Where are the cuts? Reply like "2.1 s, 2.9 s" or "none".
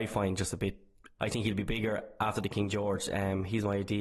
1.2 s